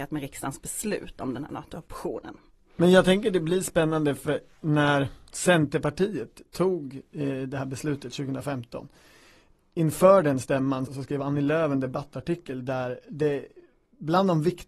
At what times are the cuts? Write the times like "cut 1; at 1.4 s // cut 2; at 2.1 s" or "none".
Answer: cut 1; at 10.9 s